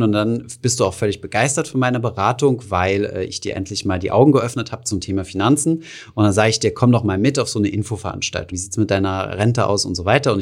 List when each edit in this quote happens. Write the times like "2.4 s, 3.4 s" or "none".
8.5 s

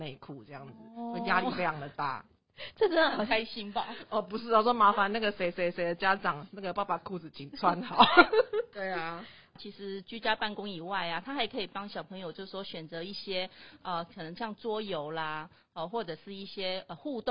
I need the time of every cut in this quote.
8.7 s

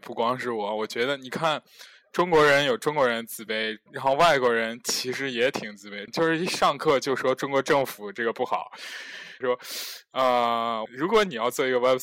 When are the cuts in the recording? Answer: 6.1 s, 9.4 s, 10.9 s

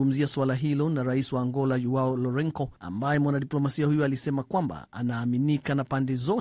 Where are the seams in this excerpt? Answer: 2.8 s

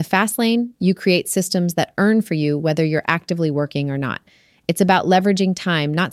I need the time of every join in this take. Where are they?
none

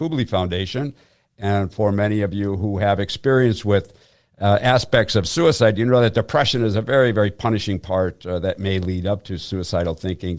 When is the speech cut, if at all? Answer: none

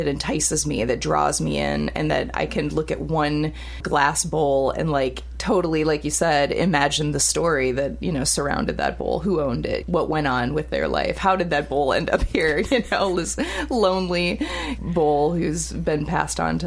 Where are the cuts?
none

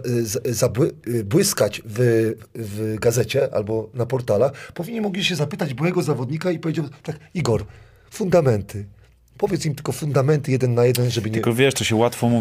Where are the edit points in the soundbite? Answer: none

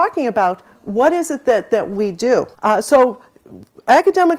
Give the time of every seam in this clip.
2.5 s

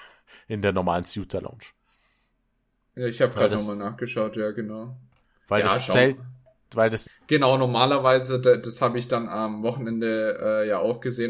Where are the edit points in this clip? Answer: 7.1 s

